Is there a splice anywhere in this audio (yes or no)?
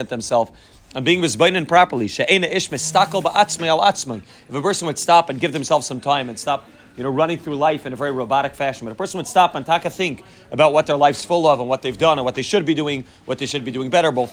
no